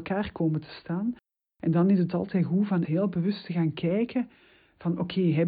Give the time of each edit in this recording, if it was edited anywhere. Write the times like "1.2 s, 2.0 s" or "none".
2.8 s